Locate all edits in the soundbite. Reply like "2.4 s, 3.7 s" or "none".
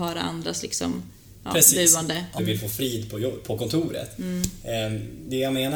2.4 s